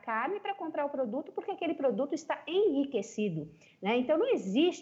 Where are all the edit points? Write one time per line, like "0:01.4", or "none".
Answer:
none